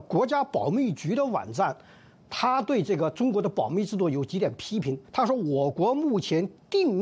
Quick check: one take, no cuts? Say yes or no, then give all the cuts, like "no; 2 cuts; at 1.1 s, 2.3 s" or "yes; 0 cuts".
no; 1 cut; at 5.0 s